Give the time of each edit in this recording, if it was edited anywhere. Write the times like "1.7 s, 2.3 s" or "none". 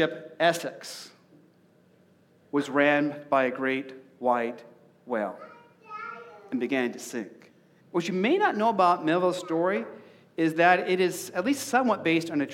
2.5 s, 7.8 s